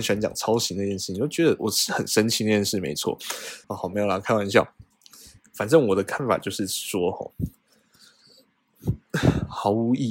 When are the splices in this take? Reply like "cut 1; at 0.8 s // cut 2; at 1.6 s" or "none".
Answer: cut 1; at 3.6 s